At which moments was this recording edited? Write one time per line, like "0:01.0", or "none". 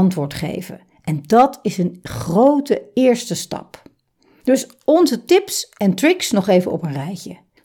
none